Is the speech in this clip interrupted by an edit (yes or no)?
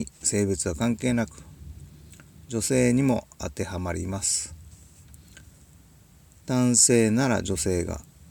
no